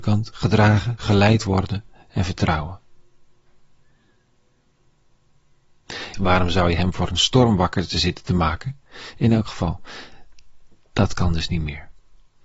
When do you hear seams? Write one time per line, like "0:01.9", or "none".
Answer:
0:01.0
0:06.1